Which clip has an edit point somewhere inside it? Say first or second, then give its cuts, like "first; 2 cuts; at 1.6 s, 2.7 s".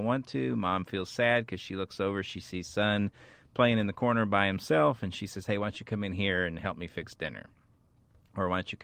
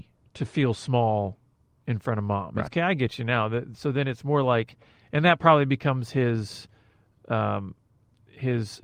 second; 1 cut; at 2.7 s